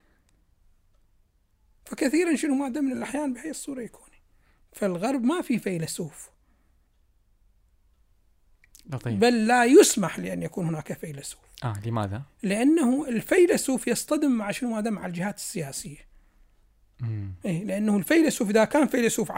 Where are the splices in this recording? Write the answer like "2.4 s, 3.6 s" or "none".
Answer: none